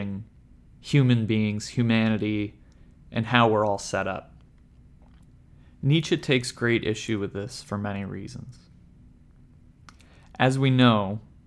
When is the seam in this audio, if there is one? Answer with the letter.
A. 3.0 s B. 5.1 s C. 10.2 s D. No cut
D